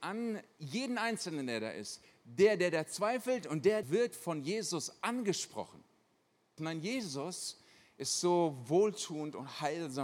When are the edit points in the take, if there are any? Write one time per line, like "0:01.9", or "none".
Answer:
0:03.8
0:06.6